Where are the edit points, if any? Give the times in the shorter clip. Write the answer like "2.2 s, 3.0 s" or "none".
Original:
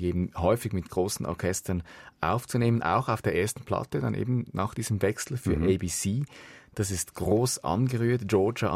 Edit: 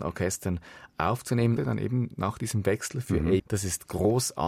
1.6 s, 3.4 s